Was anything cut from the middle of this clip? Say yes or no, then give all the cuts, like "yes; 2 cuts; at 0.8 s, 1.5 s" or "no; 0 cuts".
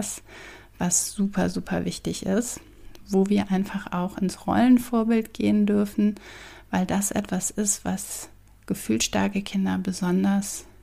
no; 0 cuts